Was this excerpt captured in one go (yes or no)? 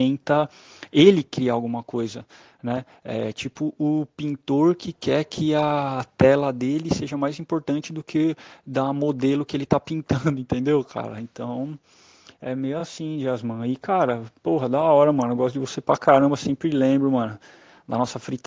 yes